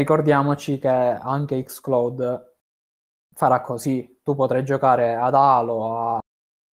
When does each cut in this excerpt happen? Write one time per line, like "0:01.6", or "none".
none